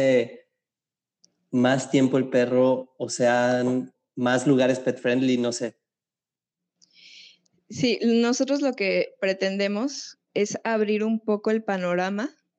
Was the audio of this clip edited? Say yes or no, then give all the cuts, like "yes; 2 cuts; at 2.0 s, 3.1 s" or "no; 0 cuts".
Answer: yes; 1 cut; at 10.2 s